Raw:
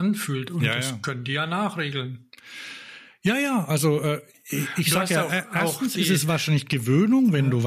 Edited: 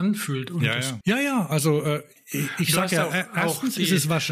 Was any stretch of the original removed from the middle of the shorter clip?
yes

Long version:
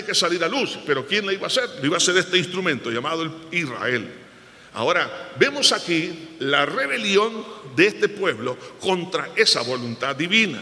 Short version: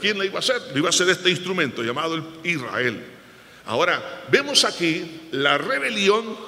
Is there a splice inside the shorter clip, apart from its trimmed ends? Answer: no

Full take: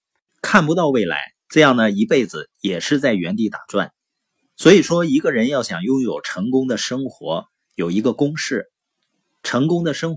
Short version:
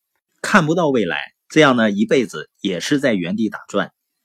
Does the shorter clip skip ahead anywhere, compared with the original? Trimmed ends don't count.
no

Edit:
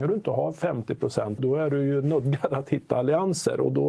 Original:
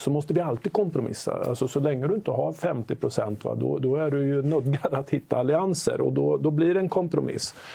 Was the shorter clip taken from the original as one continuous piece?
no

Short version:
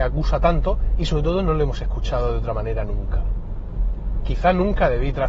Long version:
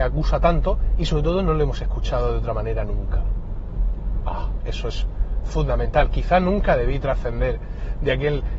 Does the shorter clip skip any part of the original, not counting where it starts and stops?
yes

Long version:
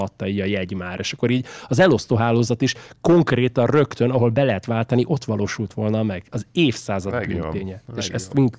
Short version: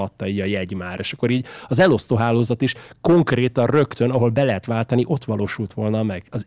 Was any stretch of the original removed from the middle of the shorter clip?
no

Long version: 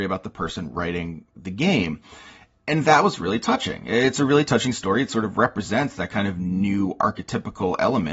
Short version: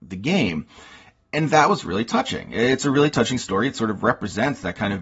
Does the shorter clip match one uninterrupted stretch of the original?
yes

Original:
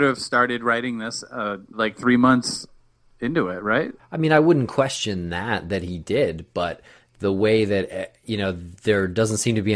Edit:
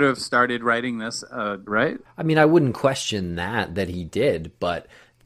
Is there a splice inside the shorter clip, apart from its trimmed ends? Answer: yes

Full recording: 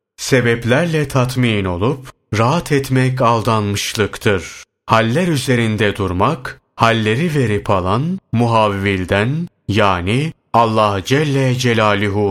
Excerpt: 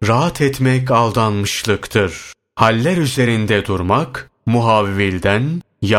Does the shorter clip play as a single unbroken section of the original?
no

